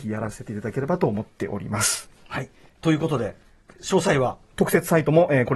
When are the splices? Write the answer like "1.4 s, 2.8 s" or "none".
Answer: none